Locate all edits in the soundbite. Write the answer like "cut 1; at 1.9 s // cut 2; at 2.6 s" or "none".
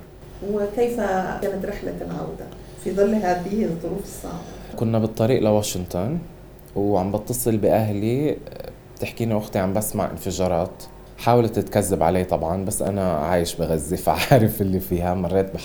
cut 1; at 4.7 s